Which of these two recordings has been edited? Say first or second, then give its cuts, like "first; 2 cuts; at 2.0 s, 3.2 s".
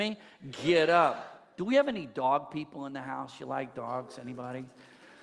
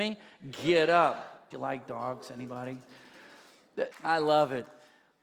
second; 2 cuts; at 1.5 s, 3.9 s